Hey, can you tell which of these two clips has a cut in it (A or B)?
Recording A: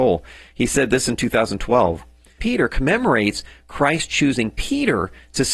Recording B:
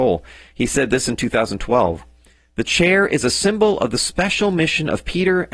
A